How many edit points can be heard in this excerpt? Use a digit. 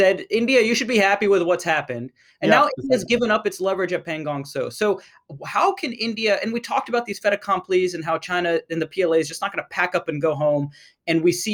0